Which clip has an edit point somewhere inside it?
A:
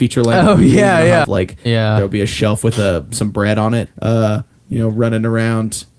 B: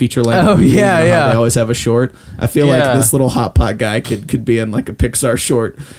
A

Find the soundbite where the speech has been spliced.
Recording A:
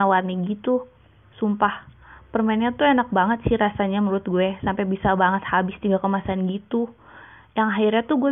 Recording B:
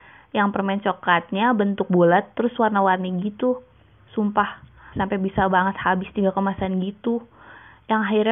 B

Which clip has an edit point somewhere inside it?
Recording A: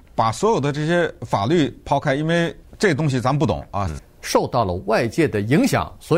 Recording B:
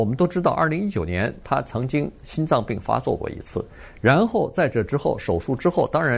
A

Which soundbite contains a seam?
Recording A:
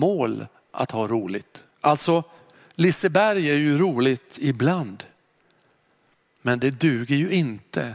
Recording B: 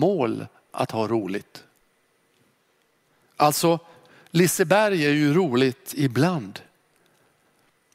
A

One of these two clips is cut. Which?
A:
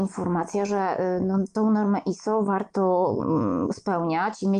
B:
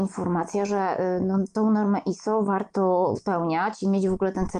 B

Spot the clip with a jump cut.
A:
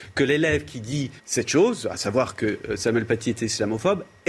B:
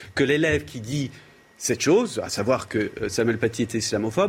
A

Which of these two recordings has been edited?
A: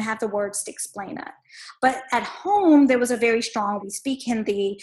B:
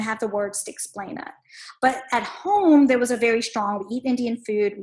A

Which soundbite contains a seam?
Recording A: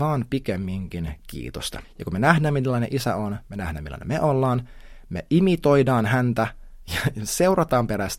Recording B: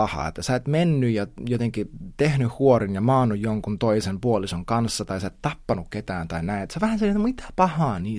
A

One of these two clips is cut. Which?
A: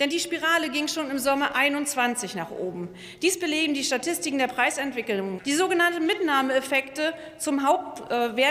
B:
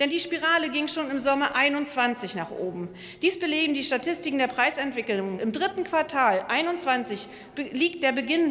A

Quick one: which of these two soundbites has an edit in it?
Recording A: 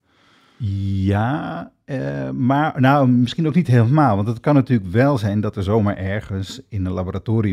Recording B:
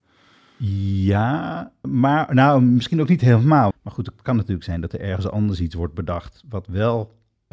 B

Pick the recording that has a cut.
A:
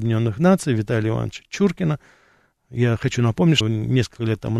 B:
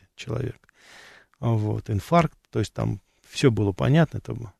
A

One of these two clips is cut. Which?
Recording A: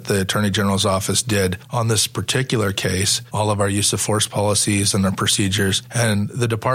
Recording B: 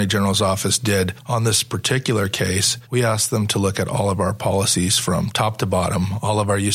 A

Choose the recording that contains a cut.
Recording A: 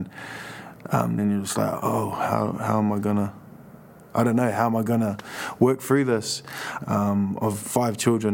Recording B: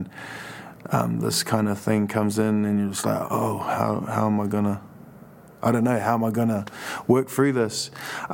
A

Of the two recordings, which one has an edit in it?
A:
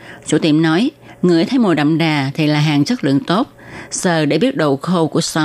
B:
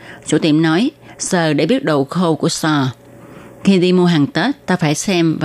B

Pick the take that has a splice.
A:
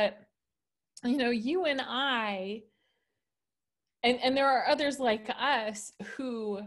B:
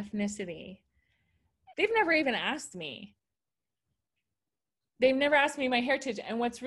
B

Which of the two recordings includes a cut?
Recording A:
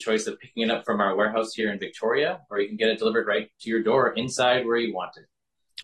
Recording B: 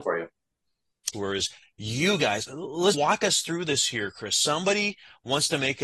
B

